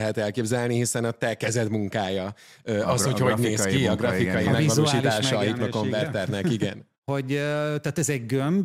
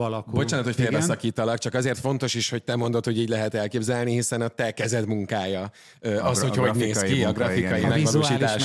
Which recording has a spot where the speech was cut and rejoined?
first; 1 cut; at 7.0 s

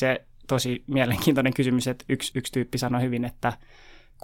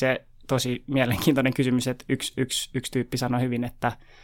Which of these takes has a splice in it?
first; 1 cut; at 2.3 s

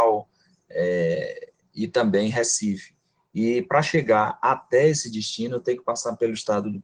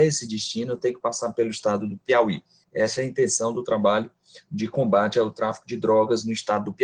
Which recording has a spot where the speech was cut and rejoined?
second; 1 cut; at 2.6 s

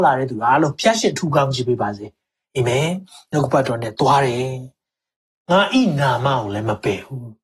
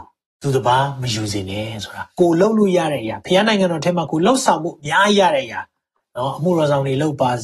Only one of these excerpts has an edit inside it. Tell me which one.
second; 1 cut; at 2.1 s

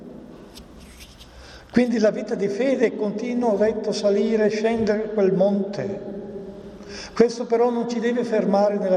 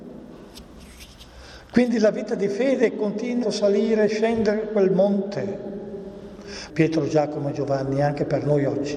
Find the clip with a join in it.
second; 2 cuts; at 3.4 s, 6.7 s

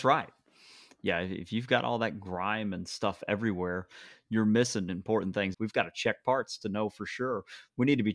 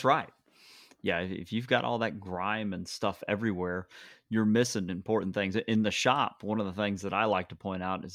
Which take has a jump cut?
first; 1 cut; at 5.5 s

